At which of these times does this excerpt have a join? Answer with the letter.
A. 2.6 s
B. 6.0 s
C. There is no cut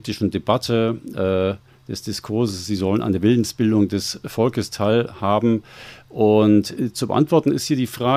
C